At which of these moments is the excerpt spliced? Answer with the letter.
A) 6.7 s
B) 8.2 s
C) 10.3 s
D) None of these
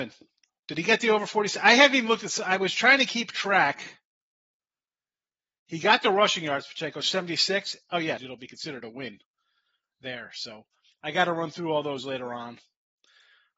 B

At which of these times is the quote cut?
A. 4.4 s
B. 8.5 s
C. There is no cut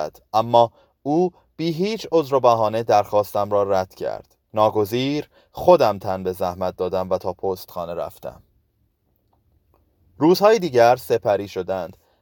A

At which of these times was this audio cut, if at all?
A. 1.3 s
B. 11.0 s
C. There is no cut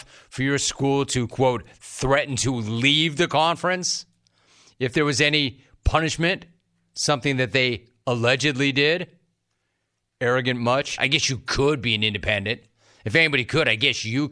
B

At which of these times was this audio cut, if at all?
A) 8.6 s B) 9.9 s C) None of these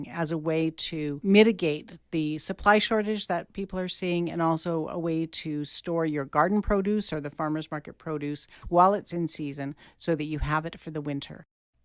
A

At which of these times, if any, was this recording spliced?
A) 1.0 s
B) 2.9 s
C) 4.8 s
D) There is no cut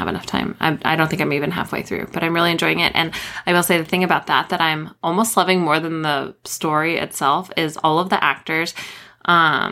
D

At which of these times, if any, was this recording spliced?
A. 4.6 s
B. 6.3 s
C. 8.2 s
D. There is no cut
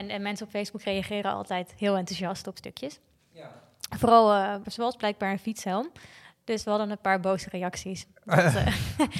A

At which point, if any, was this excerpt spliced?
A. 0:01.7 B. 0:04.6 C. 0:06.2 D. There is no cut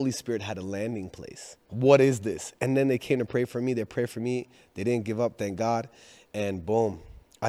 A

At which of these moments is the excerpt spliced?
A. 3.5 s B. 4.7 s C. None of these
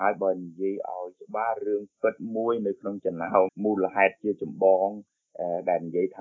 A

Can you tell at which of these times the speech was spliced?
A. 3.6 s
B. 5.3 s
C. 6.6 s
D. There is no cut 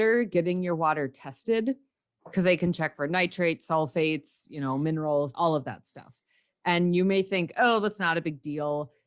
B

